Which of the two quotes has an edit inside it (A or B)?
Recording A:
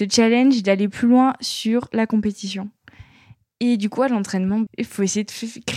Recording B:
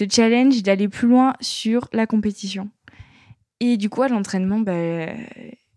A